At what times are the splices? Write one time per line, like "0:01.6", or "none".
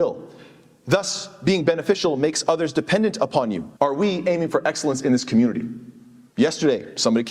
0:03.8
0:06.3